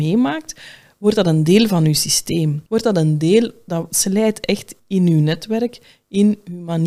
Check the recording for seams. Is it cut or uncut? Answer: cut